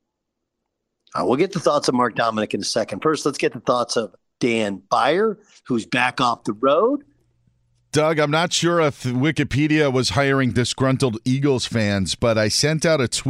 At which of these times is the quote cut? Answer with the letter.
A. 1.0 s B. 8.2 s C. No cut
C